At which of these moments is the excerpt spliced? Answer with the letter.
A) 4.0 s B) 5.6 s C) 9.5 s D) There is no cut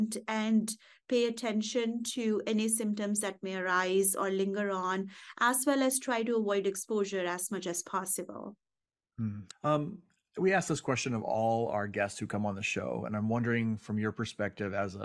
C